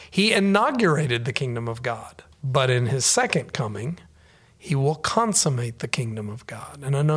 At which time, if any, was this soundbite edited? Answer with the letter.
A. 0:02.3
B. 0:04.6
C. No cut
A